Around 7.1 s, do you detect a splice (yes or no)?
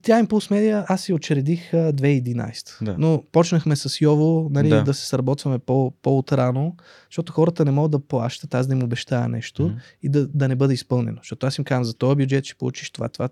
yes